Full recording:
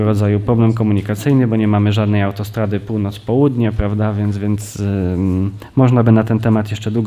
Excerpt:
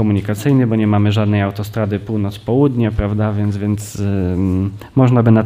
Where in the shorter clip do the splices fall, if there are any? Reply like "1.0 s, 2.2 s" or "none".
none